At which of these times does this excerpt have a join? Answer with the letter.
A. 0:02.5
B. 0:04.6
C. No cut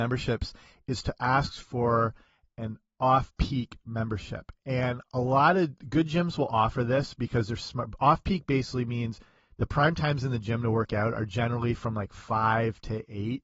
C